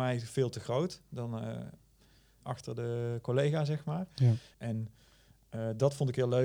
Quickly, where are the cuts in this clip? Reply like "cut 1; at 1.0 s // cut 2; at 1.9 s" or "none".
cut 1; at 2.4 s // cut 2; at 4.5 s